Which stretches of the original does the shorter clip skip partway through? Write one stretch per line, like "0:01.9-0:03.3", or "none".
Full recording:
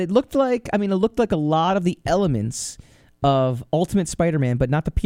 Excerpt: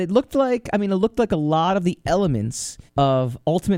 0:02.9-0:03.1